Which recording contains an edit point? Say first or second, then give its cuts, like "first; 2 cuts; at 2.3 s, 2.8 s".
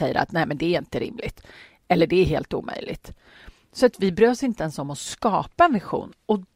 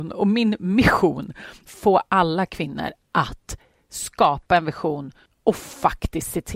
second; 1 cut; at 1.7 s